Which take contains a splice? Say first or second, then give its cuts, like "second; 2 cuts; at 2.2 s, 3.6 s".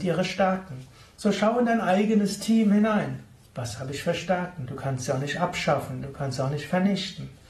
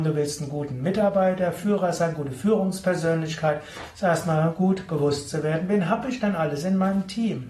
first; 1 cut; at 4.7 s